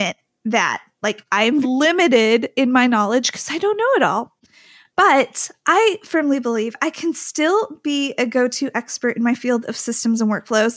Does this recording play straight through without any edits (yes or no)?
no